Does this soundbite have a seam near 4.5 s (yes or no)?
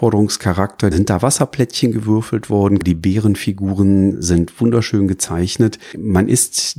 no